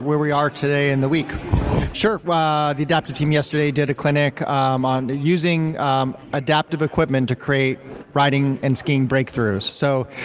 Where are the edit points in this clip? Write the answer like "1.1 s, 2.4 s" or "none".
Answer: 1.9 s